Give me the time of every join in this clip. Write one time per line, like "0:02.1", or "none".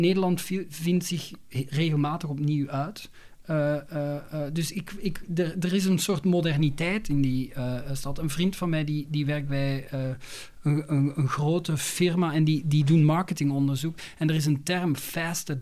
none